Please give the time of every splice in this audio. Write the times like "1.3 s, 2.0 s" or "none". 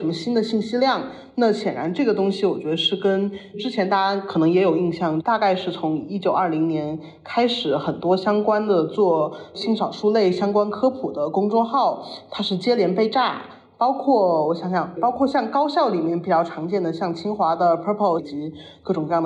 18.2 s